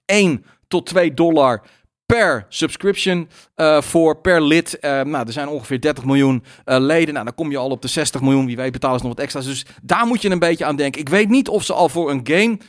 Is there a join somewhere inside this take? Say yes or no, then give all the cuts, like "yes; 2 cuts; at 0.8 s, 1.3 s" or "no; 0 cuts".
no; 0 cuts